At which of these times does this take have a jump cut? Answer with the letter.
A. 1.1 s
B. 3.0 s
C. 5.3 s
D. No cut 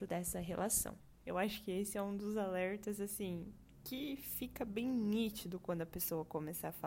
A